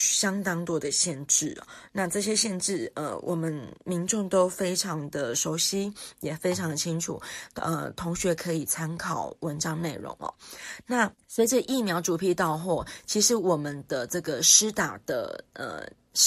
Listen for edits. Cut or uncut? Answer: uncut